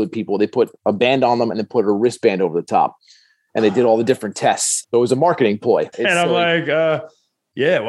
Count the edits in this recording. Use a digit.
2